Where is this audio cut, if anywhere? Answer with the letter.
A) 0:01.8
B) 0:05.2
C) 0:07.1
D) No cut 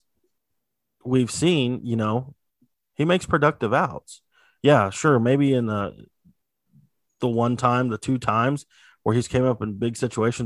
D